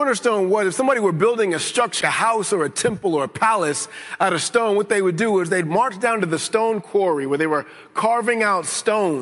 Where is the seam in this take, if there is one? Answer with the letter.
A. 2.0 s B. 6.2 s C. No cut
A